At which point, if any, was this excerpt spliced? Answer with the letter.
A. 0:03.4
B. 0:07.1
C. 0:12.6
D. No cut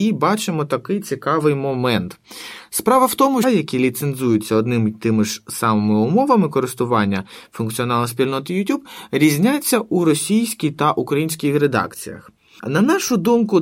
A